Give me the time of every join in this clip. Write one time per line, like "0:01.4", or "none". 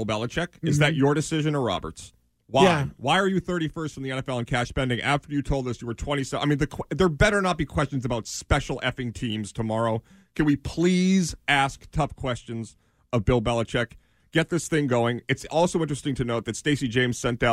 none